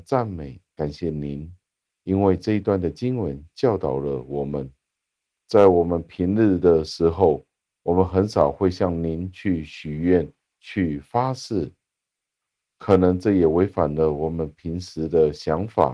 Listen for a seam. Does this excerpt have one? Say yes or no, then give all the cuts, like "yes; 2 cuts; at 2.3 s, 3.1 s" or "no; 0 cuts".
no; 0 cuts